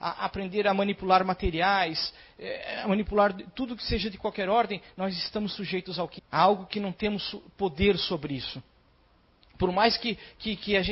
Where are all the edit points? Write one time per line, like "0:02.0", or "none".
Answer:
0:06.2